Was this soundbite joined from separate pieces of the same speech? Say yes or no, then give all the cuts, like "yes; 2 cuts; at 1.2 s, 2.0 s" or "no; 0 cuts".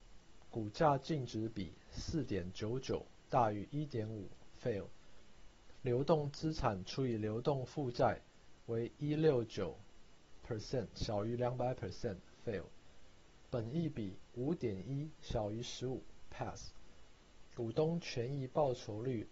yes; 2 cuts; at 5.8 s, 13.5 s